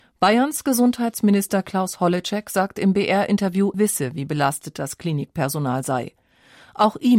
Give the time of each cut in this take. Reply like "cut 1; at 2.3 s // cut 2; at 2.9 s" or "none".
cut 1; at 3.7 s